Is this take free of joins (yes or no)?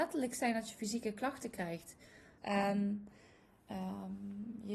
no